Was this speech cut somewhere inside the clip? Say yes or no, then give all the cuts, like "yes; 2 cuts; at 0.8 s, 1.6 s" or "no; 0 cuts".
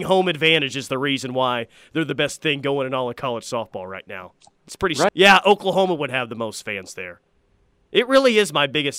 yes; 1 cut; at 5.1 s